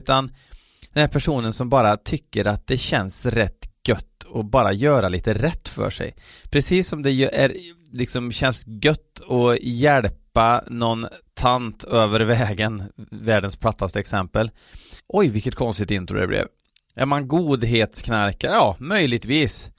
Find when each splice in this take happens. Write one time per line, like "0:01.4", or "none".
0:15.0
0:16.9